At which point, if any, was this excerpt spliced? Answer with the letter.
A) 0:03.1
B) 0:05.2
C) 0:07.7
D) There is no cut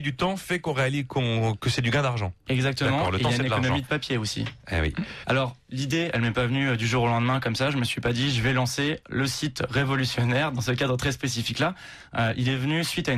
B